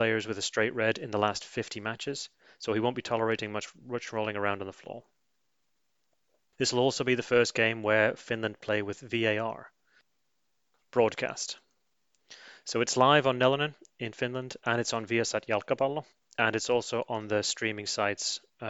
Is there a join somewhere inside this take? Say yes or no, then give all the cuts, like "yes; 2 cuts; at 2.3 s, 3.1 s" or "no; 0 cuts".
no; 0 cuts